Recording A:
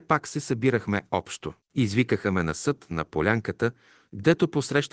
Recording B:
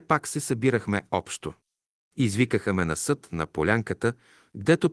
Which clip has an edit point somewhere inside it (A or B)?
A